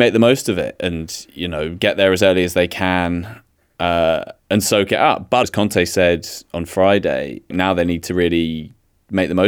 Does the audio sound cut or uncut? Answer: cut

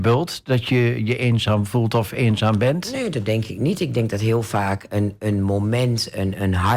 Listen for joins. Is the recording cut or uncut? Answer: cut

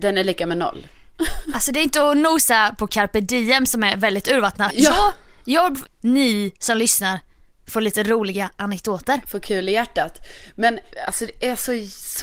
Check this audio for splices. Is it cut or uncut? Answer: cut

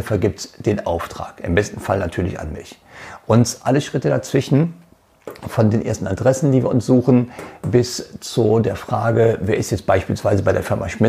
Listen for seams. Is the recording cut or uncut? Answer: uncut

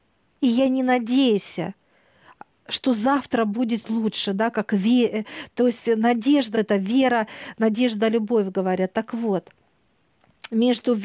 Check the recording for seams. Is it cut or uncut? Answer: cut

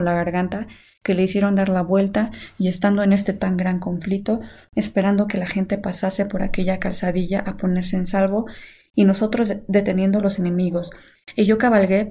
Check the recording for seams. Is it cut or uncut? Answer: cut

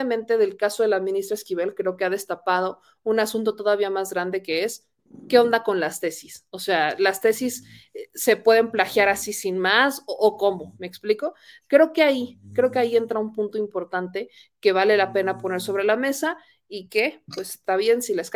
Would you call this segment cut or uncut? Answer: uncut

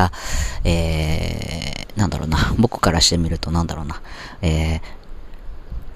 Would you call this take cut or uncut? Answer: uncut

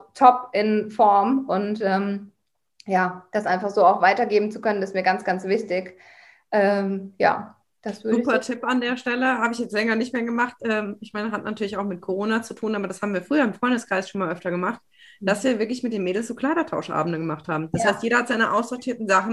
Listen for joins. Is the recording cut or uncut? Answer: uncut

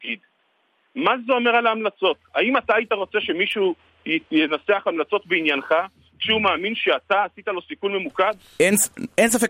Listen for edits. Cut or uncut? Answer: cut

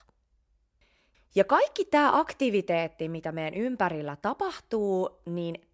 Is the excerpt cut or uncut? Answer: cut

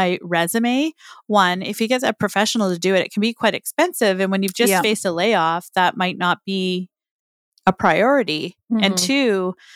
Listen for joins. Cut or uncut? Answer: uncut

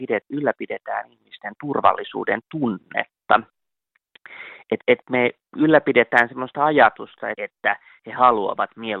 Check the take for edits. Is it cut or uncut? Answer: cut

